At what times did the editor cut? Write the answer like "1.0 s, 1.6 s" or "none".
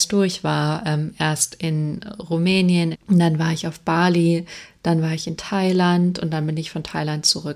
2.9 s